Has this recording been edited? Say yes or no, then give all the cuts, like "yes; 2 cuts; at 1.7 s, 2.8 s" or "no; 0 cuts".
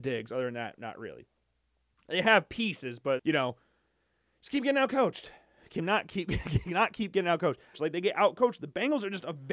yes; 2 cuts; at 3.2 s, 7.7 s